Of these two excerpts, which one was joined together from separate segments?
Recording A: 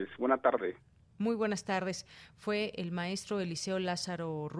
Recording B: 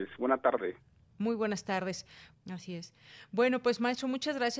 B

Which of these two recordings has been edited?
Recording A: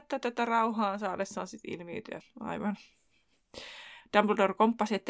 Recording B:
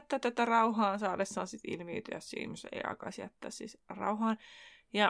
A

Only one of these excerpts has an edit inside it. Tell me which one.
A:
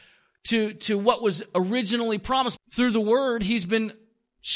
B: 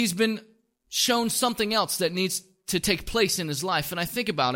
A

